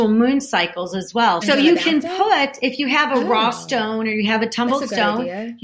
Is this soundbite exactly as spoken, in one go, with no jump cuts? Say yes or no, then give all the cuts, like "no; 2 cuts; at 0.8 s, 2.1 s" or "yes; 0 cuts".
no; 1 cut; at 1.4 s